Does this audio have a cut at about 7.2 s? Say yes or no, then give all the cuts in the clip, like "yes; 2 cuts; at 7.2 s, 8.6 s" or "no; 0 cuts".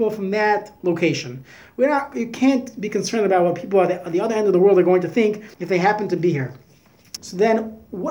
yes; 2 cuts; at 5.5 s, 7.2 s